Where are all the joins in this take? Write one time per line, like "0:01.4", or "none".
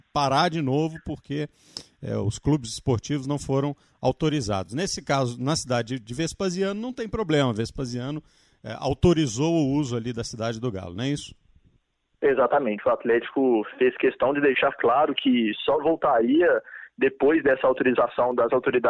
none

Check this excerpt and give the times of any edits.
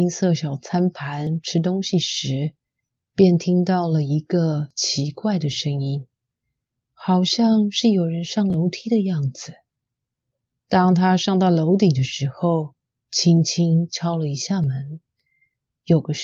none

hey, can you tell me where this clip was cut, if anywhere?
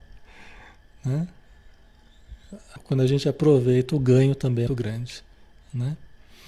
0:02.8
0:04.7

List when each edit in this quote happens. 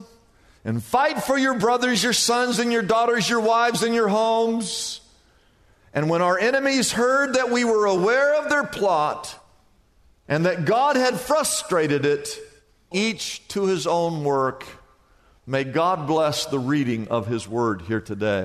0:12.9

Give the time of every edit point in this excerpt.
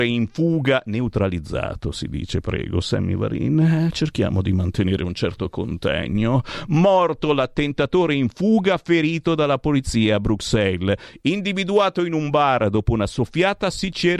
none

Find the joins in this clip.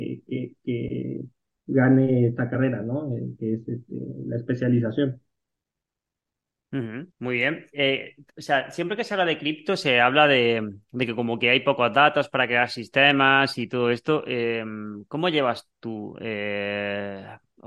0:07.1

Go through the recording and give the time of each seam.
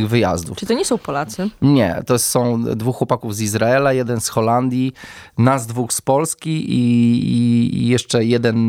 0:06.7

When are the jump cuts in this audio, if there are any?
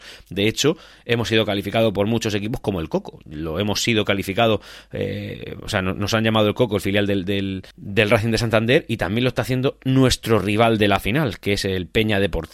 0:07.7

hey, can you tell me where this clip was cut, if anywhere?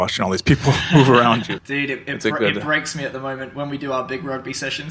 0:01.6

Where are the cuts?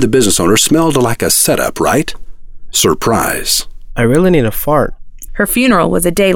0:02.7
0:05.3

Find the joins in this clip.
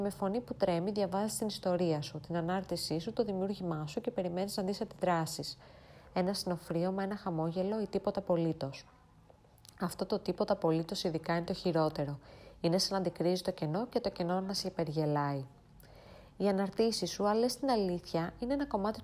none

